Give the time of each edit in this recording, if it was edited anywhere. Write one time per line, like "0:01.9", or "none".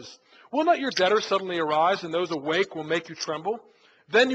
none